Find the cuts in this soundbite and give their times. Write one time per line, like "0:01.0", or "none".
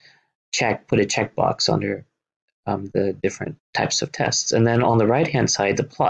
0:03.6